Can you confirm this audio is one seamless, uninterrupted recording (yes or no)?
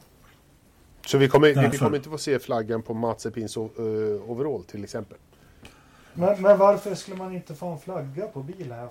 no